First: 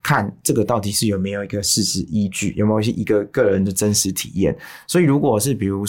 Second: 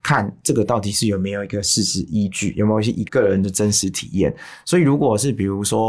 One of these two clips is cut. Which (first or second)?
second